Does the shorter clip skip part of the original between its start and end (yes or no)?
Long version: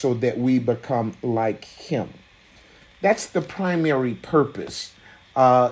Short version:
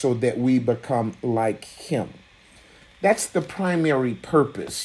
no